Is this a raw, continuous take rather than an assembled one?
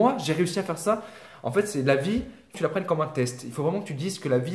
no; 1 cut; at 2.5 s

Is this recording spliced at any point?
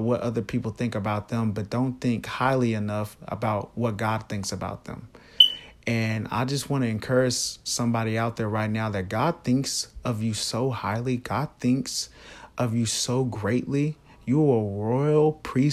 no; 0 cuts

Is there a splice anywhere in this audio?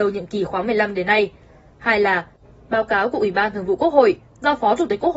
yes; 1 cut; at 1.7 s

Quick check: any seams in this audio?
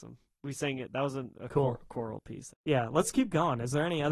yes; 1 cut; at 2.5 s

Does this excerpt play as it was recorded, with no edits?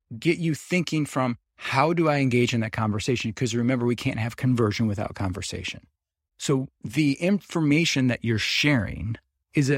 no; 1 cut; at 6.3 s

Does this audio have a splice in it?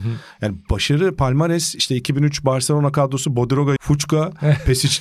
yes; 1 cut; at 3.8 s

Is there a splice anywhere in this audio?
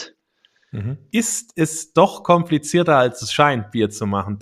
yes; 1 cut; at 1.1 s

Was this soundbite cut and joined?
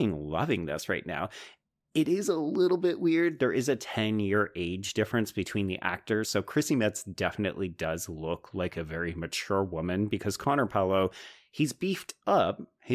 no; 0 cuts

